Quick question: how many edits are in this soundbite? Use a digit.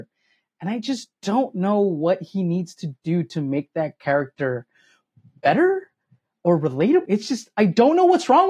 1